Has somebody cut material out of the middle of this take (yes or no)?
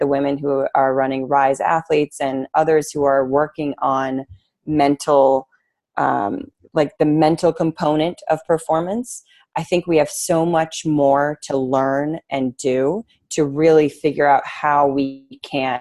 no